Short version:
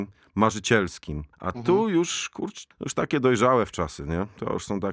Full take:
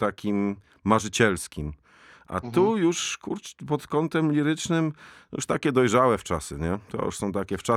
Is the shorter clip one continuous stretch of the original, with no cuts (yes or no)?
no